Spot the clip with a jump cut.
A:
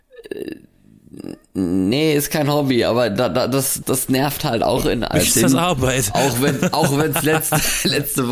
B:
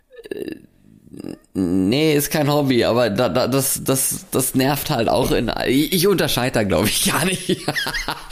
A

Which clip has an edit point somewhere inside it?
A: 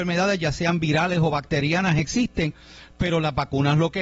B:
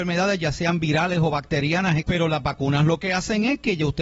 B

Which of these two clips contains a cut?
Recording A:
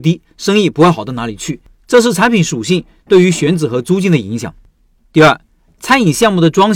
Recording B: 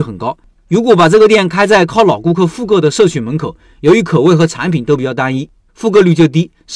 B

